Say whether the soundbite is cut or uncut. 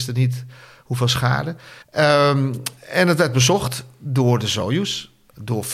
cut